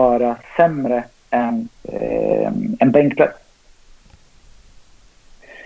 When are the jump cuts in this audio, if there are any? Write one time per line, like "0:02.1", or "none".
0:01.7